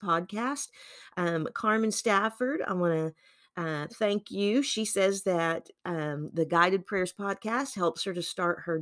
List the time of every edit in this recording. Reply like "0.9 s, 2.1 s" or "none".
none